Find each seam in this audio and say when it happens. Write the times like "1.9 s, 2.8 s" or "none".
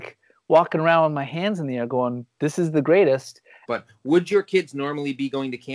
3.7 s